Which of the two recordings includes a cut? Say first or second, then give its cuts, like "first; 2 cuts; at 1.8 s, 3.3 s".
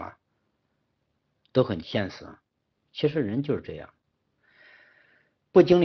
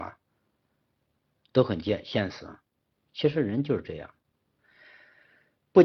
first; 1 cut; at 1.8 s